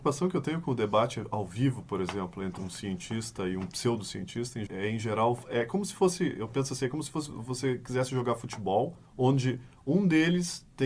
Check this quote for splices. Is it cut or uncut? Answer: cut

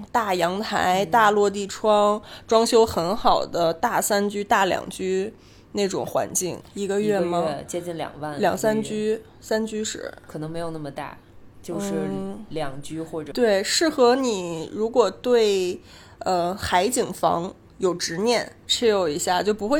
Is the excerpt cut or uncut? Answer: cut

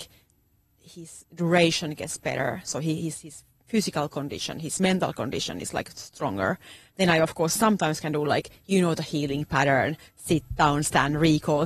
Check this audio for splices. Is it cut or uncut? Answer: uncut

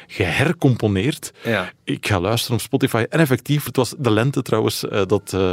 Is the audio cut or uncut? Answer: cut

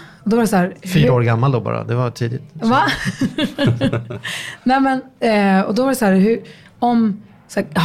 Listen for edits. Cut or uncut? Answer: uncut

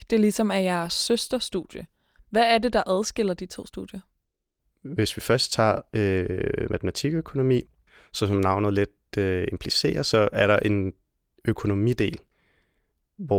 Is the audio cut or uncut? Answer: uncut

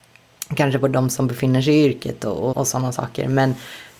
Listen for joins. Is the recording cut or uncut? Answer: cut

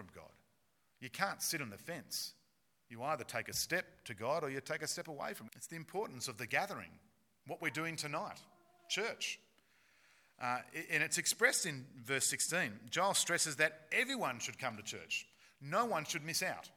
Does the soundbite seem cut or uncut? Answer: cut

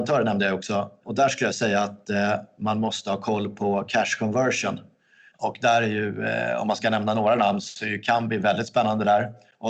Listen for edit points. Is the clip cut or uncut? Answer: cut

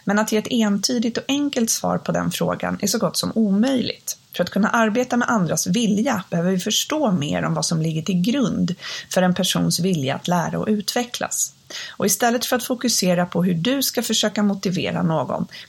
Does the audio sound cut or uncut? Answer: uncut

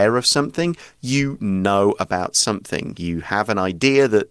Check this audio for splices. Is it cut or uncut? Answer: uncut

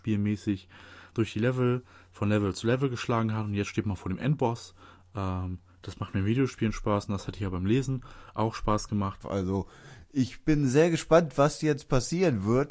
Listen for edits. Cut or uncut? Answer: cut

